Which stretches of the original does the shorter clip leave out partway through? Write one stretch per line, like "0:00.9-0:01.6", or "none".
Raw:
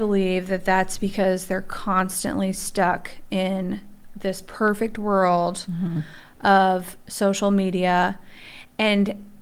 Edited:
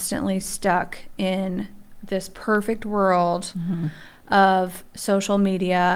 none